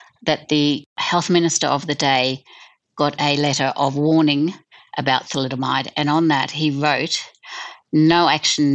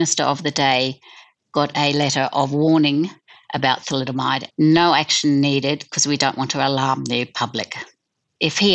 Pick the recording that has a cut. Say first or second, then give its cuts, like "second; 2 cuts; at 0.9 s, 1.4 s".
second; 1 cut; at 4.5 s